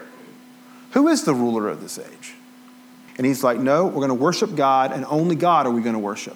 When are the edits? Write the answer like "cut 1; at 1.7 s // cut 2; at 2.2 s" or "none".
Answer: cut 1; at 3.1 s